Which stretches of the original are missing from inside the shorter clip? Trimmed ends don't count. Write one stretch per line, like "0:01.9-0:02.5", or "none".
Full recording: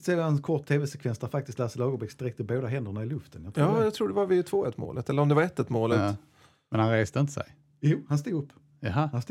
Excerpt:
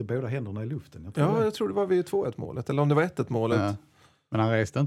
none